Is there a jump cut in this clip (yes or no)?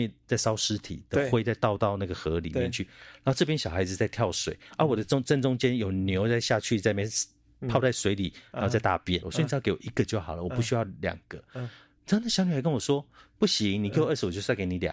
yes